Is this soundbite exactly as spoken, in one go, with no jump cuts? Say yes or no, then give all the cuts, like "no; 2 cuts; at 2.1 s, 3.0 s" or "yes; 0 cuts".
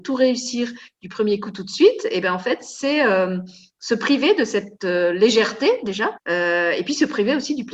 no; 1 cut; at 6.2 s